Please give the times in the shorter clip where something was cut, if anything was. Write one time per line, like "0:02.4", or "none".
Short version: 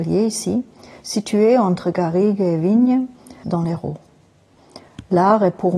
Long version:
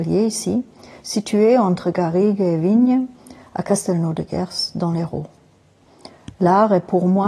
0:03.4